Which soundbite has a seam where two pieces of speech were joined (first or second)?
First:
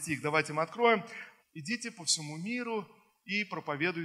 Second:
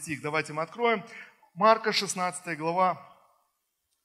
first